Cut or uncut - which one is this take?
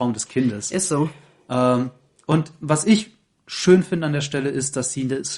uncut